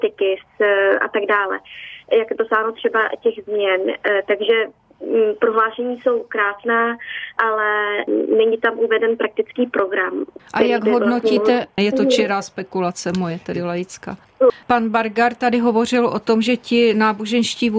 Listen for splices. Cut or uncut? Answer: cut